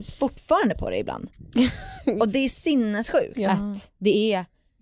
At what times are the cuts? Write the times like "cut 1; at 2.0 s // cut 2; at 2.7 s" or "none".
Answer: cut 1; at 3.5 s